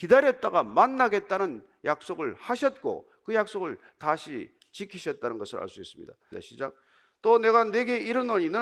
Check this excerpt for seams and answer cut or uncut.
cut